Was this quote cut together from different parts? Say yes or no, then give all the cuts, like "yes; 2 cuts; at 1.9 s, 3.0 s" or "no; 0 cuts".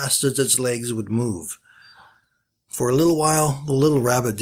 no; 0 cuts